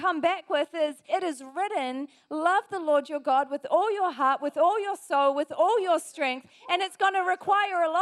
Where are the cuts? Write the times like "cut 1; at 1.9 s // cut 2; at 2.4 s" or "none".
cut 1; at 1.1 s